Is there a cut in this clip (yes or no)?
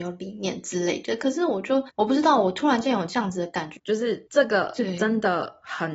yes